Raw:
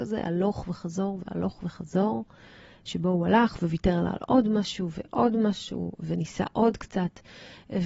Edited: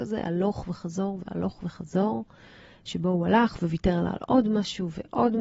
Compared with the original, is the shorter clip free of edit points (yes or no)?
yes